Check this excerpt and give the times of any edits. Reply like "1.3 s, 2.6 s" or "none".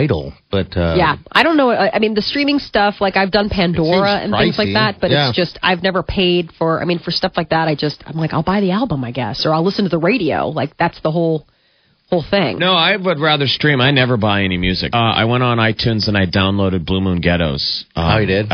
14.9 s